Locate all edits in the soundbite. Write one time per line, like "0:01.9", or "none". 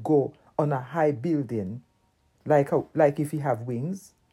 0:02.3